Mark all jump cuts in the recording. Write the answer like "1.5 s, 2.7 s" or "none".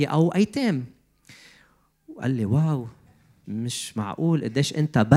3.4 s